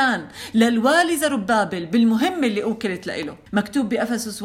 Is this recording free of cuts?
no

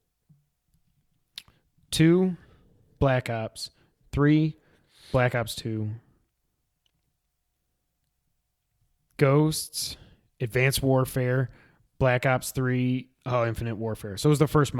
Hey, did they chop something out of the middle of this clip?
no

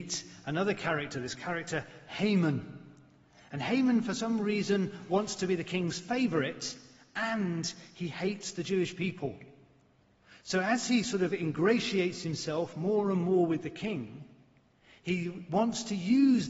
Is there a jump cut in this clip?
no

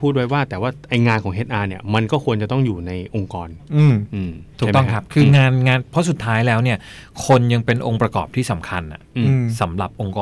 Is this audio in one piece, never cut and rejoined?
no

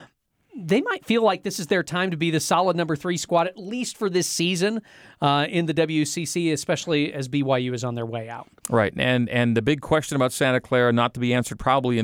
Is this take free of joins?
yes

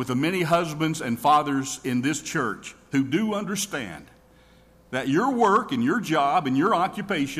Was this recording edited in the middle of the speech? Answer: no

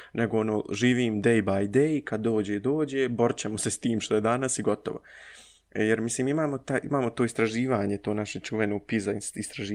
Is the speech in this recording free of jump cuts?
yes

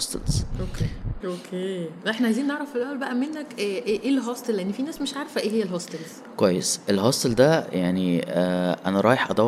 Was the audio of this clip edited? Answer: yes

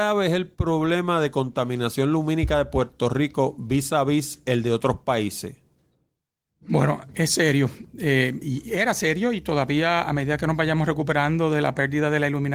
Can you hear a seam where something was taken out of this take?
yes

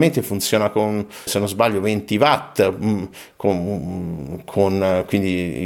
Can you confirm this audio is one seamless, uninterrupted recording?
no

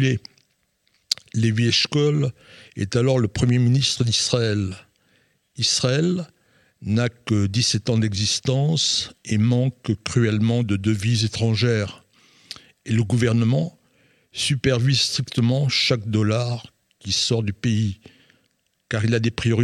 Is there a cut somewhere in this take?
no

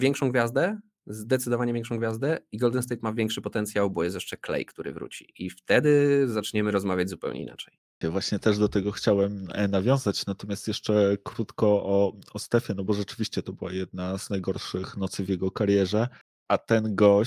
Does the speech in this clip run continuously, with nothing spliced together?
no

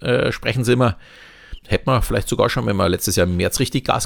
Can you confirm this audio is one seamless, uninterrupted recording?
no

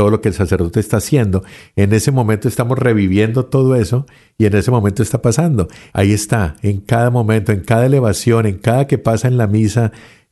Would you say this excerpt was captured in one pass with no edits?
no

